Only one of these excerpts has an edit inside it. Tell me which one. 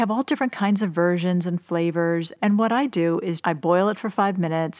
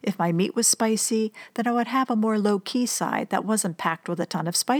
first; 1 cut; at 3.4 s

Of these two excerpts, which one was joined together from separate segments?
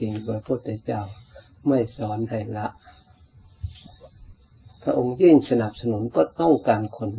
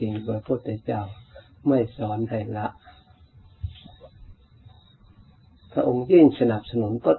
first; 1 cut; at 4.8 s

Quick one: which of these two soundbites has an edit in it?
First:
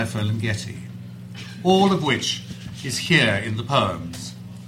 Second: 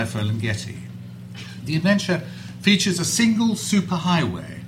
second; 1 cut; at 1.6 s

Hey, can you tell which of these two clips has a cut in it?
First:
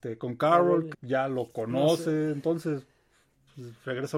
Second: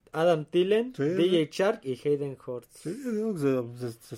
first; 1 cut; at 0.9 s

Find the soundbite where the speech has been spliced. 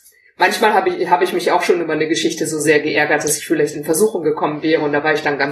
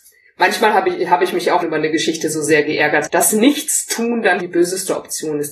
second; 3 cuts; at 1.6 s, 3.1 s, 4.4 s

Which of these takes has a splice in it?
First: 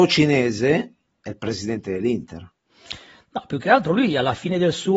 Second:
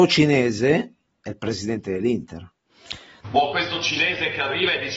second; 1 cut; at 3.2 s

